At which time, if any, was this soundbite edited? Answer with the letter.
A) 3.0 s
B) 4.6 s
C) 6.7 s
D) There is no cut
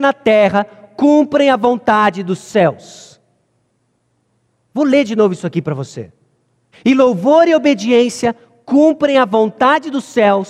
C